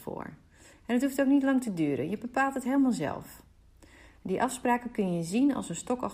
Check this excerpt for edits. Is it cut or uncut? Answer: uncut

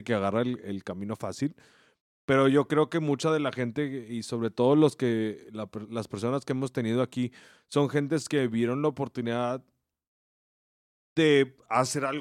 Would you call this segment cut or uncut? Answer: uncut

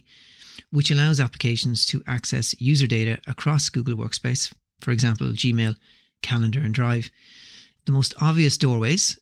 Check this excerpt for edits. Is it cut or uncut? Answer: cut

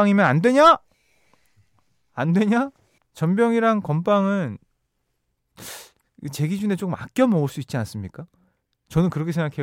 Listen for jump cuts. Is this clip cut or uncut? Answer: cut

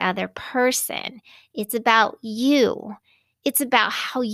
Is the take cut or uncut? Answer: uncut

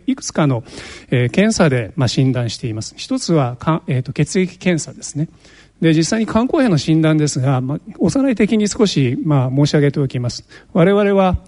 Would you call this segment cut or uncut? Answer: cut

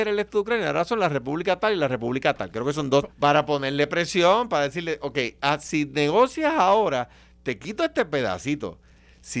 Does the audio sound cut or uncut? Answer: cut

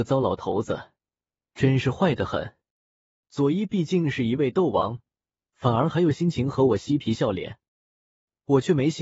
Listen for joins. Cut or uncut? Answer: cut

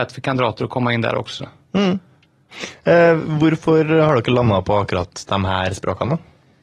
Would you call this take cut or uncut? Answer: uncut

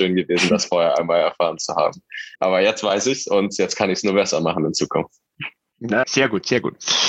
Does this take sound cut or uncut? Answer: cut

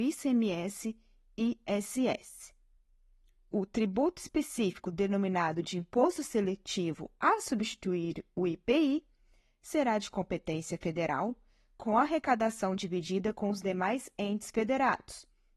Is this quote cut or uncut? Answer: uncut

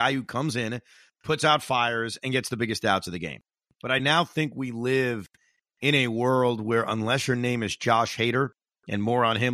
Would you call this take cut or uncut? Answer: uncut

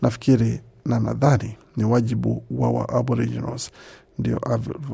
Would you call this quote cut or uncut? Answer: uncut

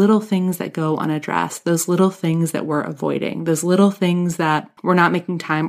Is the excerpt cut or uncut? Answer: cut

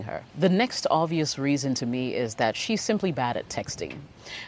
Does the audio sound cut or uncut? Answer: uncut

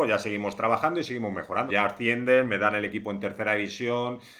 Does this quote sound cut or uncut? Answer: cut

